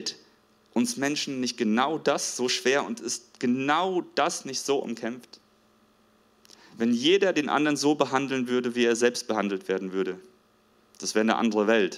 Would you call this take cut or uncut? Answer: uncut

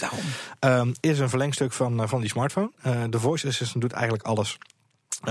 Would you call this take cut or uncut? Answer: cut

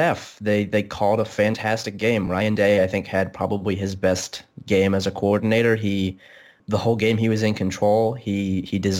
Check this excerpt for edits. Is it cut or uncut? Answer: uncut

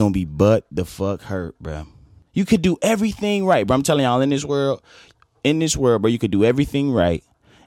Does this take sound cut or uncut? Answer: uncut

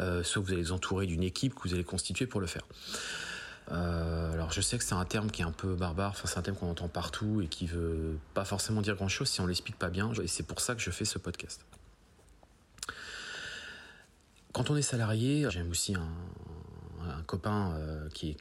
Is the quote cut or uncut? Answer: cut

